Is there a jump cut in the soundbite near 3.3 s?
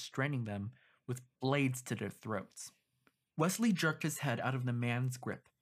yes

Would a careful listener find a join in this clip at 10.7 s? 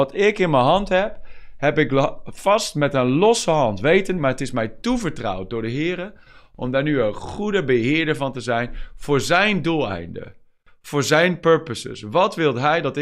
no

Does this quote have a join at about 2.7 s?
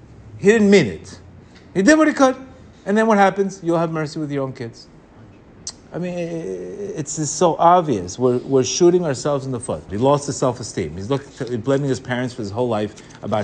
yes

